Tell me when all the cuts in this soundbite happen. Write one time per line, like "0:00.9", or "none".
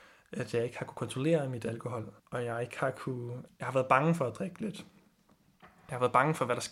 0:02.2
0:03.5